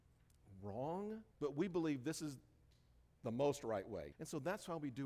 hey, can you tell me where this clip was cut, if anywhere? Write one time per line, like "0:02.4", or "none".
0:01.3
0:04.1